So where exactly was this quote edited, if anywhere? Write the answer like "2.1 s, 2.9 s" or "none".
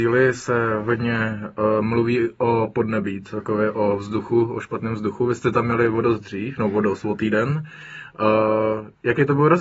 none